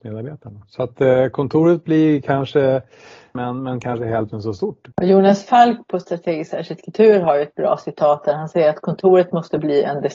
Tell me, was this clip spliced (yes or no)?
yes